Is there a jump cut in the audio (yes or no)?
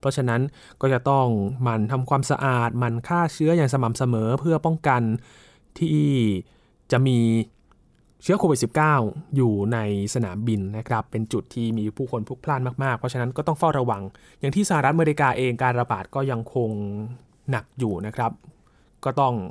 no